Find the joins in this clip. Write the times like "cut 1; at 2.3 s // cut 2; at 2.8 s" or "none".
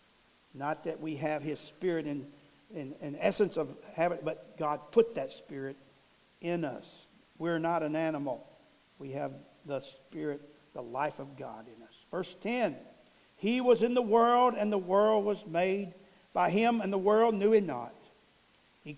none